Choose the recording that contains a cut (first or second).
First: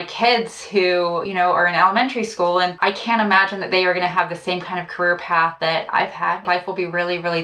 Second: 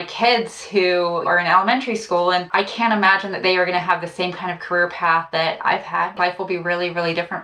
second